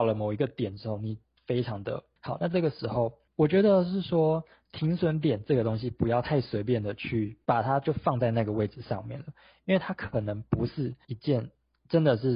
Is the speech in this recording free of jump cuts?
no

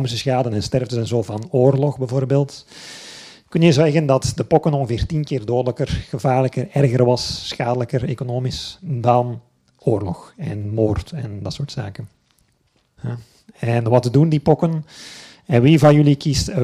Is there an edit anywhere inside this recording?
yes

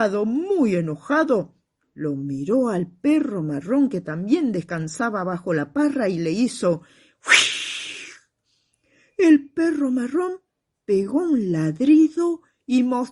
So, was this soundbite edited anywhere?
no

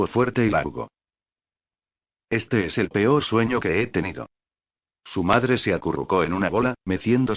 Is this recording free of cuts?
no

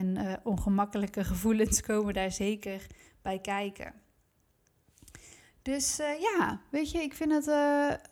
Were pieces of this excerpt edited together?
no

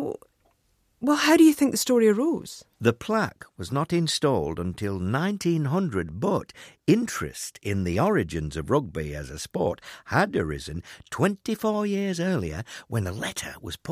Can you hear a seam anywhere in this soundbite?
no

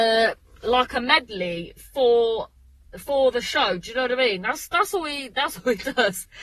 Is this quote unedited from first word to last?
yes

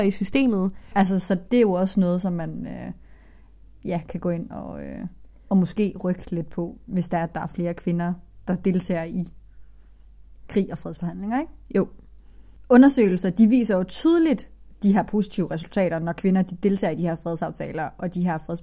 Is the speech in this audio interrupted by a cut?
yes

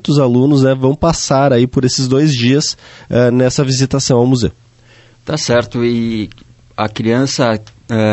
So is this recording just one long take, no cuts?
yes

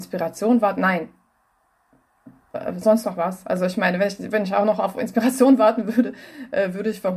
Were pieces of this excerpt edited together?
no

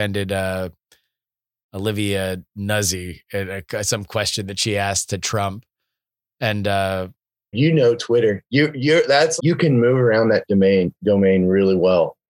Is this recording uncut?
no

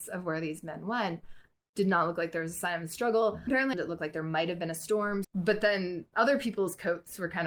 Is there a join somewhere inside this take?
yes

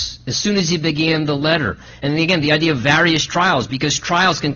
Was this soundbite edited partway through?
no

